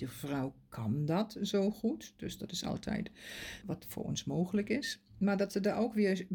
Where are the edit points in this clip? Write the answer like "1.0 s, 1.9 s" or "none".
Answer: 3.6 s